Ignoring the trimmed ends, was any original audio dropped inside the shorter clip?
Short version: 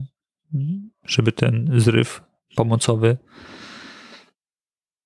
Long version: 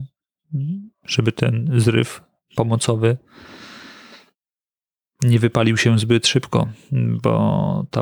no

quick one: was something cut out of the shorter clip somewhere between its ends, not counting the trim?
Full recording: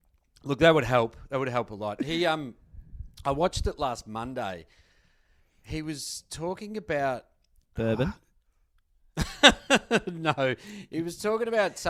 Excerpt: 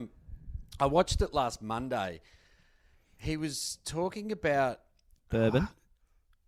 no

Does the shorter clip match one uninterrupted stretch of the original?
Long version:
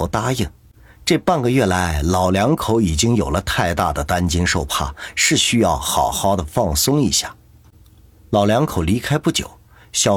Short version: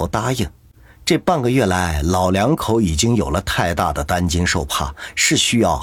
yes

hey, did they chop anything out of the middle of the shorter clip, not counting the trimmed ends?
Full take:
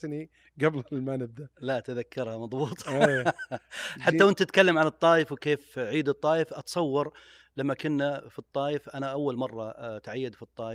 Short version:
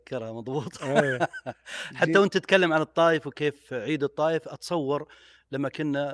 no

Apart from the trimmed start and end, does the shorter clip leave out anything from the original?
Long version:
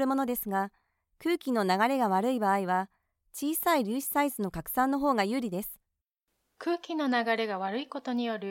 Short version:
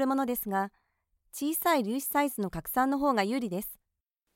yes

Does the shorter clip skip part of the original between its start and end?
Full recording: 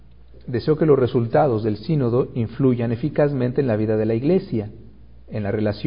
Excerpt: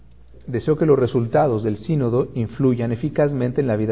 no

